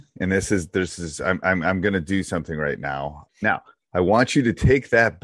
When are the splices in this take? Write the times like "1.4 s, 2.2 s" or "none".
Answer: 3.3 s

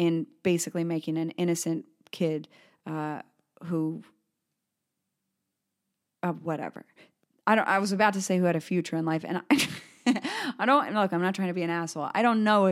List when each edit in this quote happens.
none

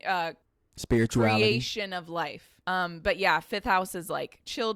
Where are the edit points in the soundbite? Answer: 2.6 s

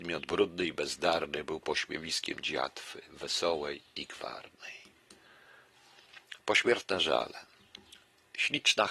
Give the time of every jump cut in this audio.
none

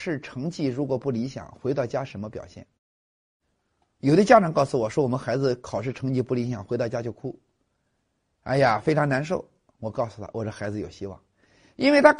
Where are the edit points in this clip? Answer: 2.8 s

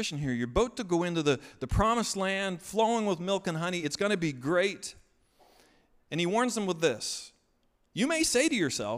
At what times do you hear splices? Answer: none

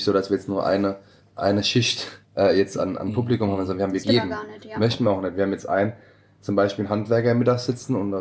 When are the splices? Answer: 2.2 s, 4.0 s

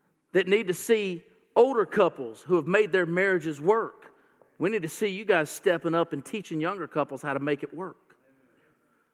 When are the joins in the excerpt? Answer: none

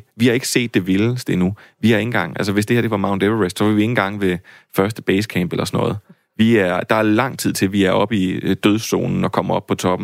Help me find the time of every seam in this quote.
none

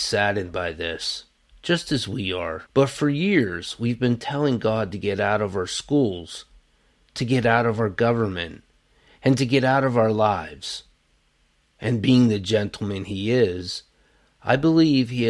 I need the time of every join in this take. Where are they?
2.7 s

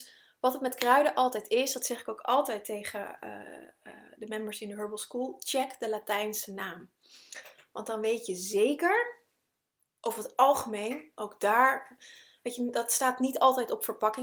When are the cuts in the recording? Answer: none

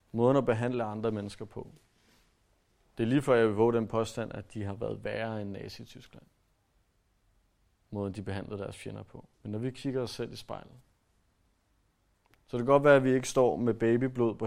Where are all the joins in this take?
9.3 s

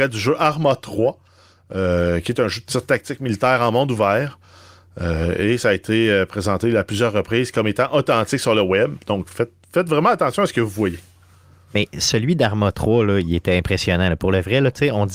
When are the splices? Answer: none

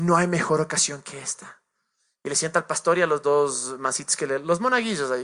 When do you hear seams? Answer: none

